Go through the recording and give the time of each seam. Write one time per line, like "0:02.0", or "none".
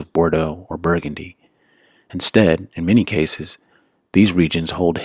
none